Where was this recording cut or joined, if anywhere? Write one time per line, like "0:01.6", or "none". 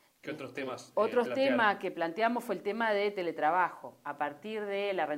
none